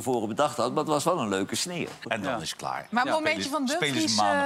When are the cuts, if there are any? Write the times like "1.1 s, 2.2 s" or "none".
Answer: 2.0 s

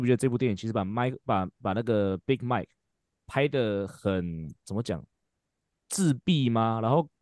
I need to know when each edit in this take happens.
none

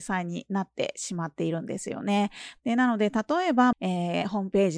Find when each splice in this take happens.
2.6 s, 3.7 s

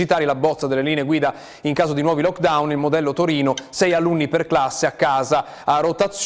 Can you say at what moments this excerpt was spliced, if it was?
none

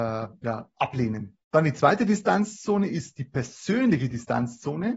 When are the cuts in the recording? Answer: 1.4 s

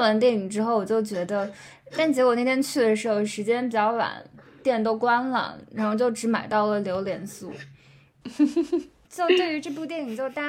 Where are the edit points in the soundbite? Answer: 1.9 s, 8.2 s

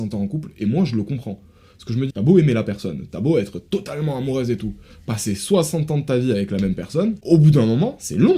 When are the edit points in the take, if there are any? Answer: 2.1 s

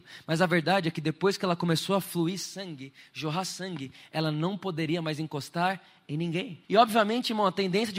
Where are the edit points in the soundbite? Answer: 6.6 s

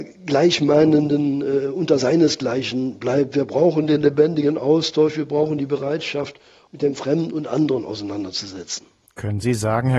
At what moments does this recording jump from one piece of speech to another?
6.7 s

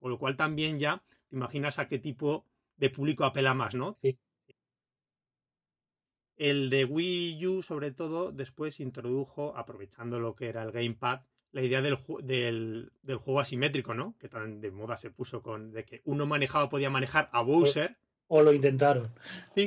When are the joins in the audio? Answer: 4.0 s

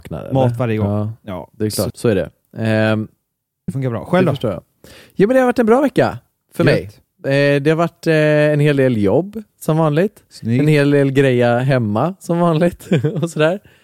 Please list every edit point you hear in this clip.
1.9 s, 3.7 s

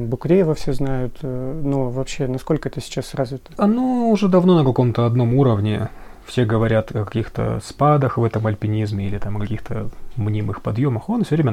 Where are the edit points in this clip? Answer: none

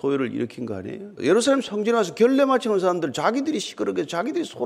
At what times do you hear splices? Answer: 1.2 s

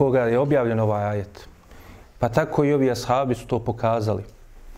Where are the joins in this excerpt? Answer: 2.0 s

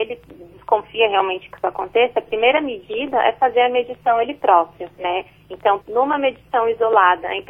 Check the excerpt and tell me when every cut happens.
5.8 s

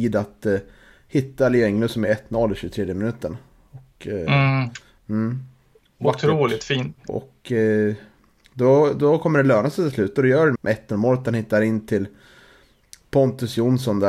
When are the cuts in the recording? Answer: 7.1 s, 10.5 s

